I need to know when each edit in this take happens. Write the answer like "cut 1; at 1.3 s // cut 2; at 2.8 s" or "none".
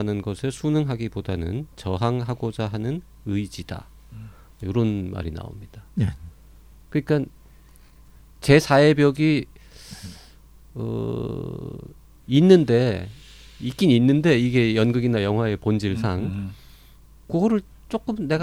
none